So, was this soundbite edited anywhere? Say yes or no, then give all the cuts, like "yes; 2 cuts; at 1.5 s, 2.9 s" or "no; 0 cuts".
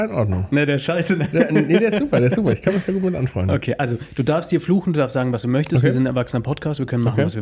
no; 0 cuts